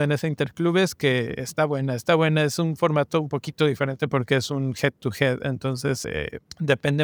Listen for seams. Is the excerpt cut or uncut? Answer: uncut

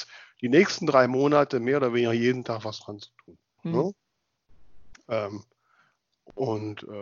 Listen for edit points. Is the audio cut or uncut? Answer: cut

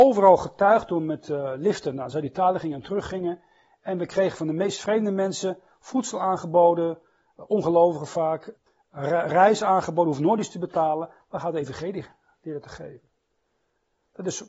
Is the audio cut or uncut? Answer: uncut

